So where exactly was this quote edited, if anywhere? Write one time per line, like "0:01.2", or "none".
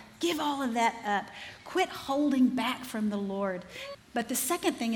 0:03.9